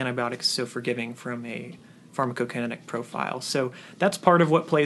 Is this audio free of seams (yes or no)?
yes